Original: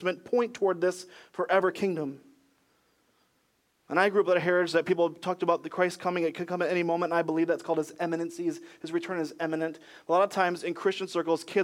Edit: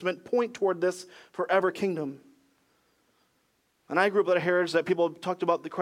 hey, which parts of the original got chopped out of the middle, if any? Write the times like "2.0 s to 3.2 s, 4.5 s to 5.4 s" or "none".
none